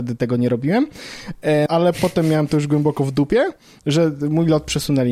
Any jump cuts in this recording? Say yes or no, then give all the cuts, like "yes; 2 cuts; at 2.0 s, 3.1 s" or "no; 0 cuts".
yes; 2 cuts; at 1.7 s, 3.8 s